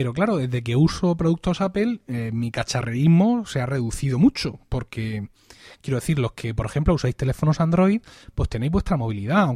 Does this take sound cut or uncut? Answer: uncut